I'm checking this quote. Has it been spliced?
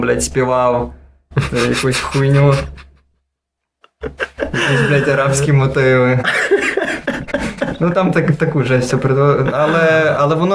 no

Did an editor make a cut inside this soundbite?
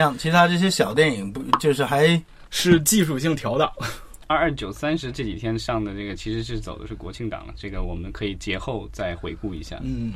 yes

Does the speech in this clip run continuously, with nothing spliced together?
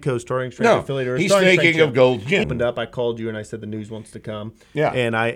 no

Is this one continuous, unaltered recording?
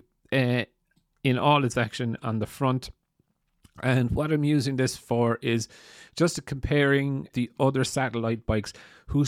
no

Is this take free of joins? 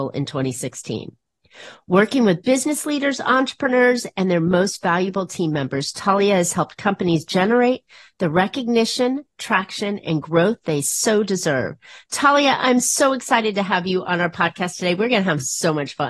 yes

